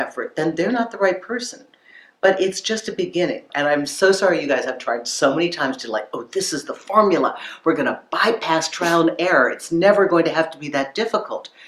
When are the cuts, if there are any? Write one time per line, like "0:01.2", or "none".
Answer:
0:03.5